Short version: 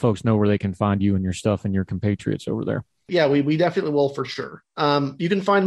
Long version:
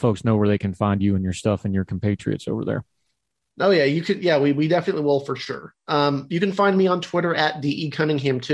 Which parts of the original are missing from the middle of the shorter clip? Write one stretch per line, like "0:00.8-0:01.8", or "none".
0:03.1-0:04.2